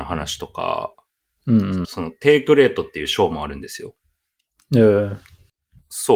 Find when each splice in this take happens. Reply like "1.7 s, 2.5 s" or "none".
1.8 s